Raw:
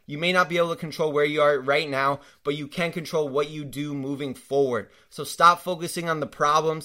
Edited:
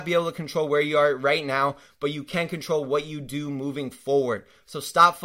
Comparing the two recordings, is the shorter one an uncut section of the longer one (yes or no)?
yes